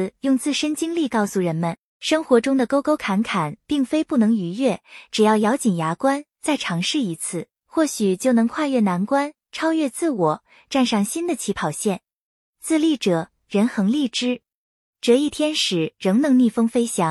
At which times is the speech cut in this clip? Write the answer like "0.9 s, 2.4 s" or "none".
6.3 s